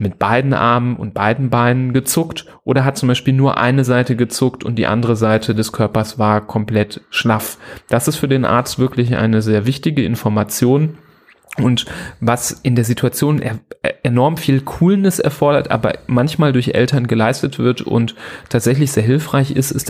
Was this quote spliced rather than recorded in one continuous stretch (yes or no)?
no